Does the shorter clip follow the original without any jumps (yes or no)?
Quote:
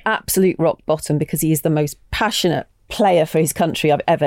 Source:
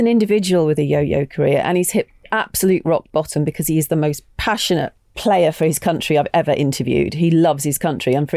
yes